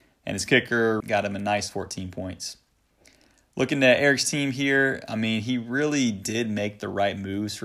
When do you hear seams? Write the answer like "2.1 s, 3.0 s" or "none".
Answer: 1.0 s

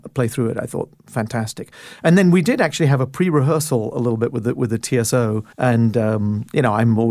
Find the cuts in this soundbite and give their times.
5.5 s

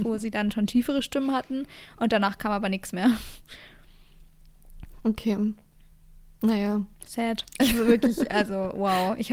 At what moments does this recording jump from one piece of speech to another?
7.6 s

